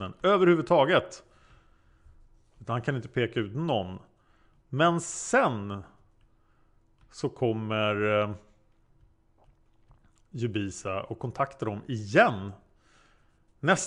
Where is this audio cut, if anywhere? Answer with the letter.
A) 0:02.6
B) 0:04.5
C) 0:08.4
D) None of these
D